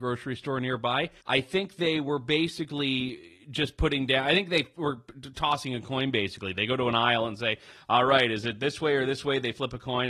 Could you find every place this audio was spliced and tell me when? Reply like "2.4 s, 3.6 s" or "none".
1.2 s